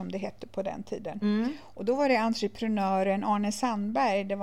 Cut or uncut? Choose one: uncut